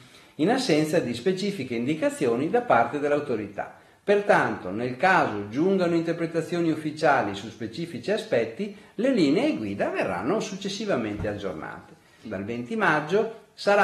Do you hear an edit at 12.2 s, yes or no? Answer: yes